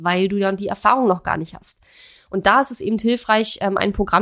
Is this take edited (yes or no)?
no